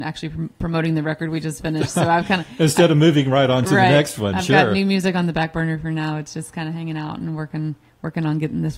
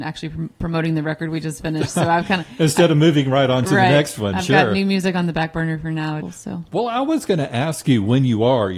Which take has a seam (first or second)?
second